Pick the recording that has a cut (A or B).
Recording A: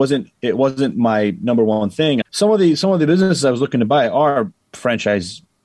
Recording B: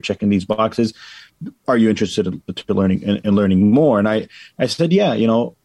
A